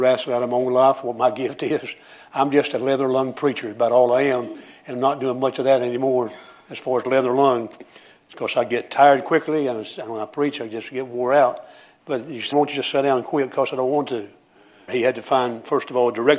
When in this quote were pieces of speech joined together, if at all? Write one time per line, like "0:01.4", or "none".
0:12.5
0:14.9